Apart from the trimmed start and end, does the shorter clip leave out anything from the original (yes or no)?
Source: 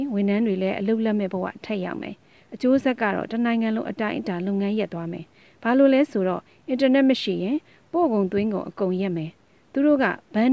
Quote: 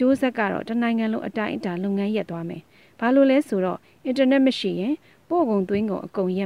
no